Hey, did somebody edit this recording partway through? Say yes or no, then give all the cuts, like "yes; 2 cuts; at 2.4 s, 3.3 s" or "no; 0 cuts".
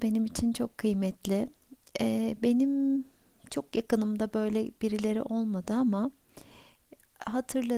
no; 0 cuts